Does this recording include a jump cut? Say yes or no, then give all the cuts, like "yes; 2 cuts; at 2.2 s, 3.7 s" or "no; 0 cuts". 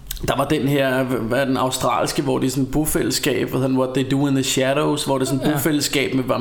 no; 0 cuts